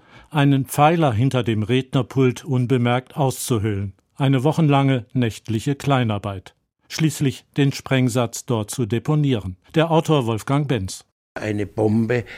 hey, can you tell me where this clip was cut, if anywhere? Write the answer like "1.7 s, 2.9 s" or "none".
9.6 s